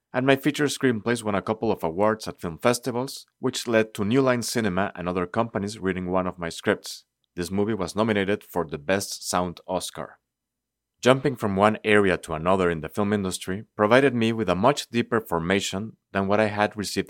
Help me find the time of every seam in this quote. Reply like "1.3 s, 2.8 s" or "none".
7.2 s